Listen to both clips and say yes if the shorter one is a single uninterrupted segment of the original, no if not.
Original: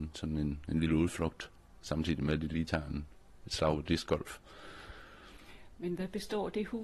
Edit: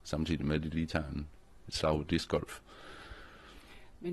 yes